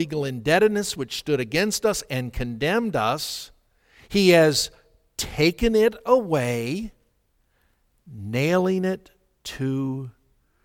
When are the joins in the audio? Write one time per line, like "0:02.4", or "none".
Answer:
none

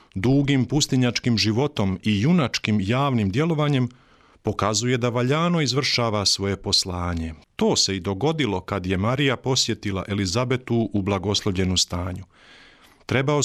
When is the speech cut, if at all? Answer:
0:07.4

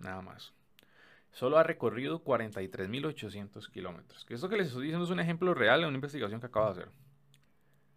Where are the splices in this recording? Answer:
none

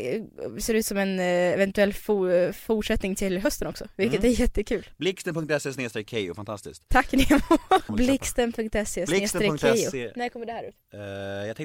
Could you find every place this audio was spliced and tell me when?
0:07.9

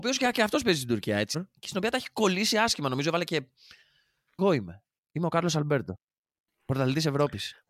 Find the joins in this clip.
0:01.3
0:04.4

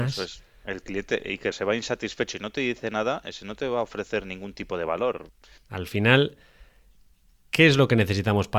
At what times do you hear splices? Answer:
0:01.5
0:05.6

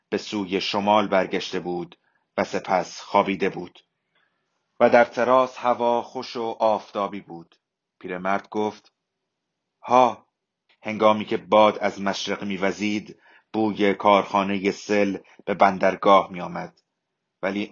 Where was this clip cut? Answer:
0:07.8
0:10.7

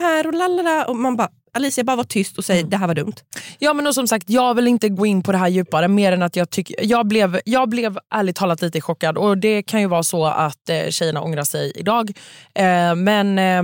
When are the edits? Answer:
none

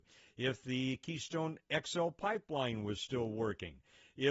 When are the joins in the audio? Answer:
none

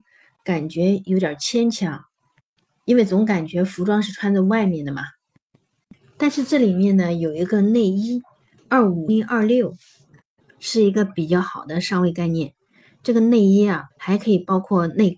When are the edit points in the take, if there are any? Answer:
0:09.1
0:13.9

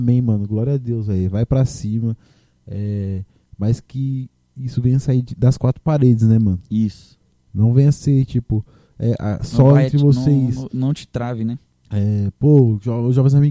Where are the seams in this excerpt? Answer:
0:11.7

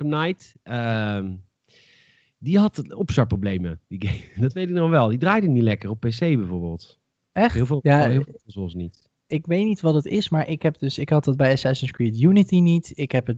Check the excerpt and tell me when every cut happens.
none

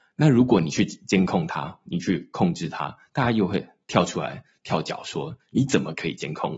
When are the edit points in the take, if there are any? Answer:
none

